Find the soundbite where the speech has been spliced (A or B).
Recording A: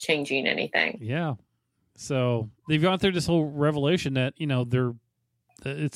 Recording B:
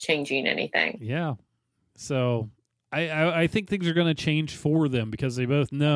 A